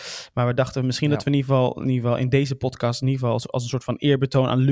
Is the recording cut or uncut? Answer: uncut